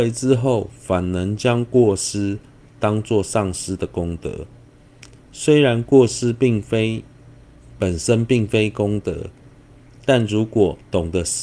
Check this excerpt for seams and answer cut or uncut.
uncut